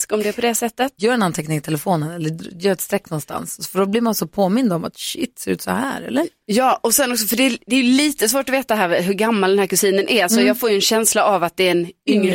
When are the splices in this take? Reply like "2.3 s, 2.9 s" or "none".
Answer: 1.0 s